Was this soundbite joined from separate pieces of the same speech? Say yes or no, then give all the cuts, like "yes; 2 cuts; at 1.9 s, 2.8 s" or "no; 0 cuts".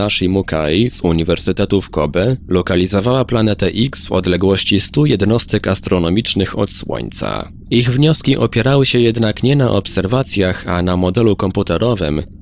no; 0 cuts